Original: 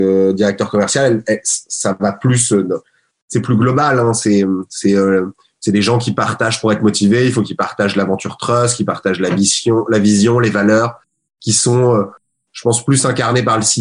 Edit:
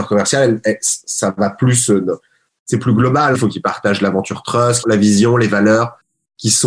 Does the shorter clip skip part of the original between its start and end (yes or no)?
yes